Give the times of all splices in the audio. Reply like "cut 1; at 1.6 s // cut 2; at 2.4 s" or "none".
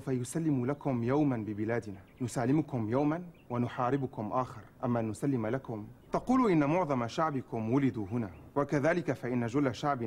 cut 1; at 6.0 s

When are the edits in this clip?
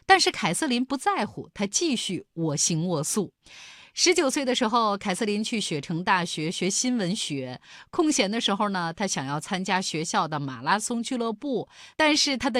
none

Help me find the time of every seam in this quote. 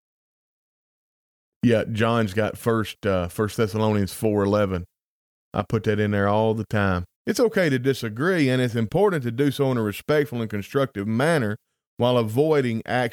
cut 1; at 7.2 s

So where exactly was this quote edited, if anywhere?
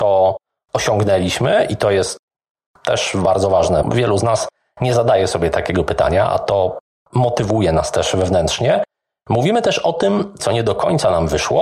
cut 1; at 3.8 s // cut 2; at 10.4 s

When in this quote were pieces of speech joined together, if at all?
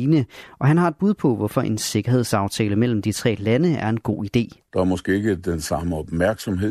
cut 1; at 4.7 s

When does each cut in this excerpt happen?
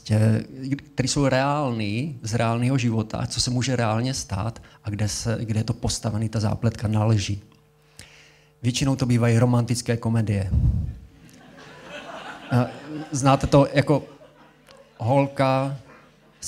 none

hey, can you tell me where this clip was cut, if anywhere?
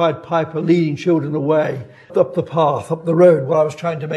cut 1; at 2.1 s

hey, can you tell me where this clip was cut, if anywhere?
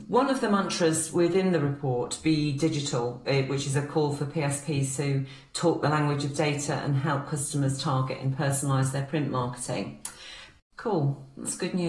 cut 1; at 10.6 s

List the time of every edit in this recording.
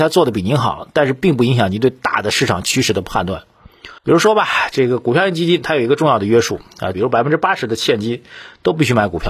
cut 1; at 4.0 s // cut 2; at 6.9 s

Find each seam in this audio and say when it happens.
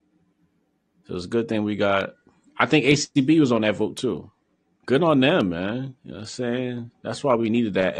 cut 1; at 4.8 s // cut 2; at 6.0 s

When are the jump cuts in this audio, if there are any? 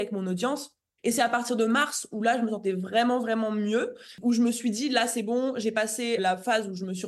cut 1; at 1.0 s

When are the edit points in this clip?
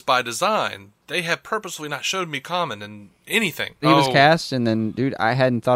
cut 1; at 3.8 s

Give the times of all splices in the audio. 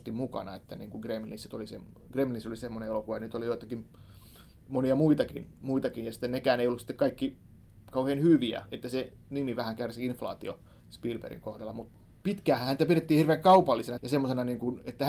cut 1; at 10.8 s // cut 2; at 14.0 s

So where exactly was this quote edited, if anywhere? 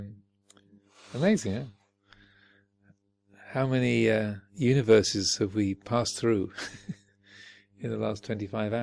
none

